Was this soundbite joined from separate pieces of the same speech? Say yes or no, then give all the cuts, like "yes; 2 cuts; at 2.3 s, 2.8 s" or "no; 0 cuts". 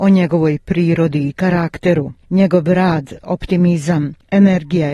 yes; 1 cut; at 2.2 s